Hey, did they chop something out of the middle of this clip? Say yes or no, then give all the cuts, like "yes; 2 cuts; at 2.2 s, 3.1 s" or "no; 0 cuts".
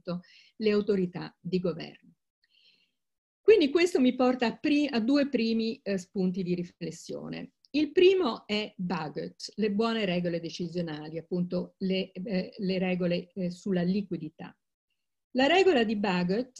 no; 0 cuts